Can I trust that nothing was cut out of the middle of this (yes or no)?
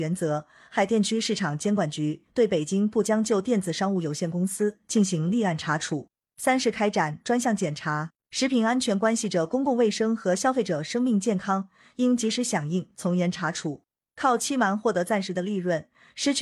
no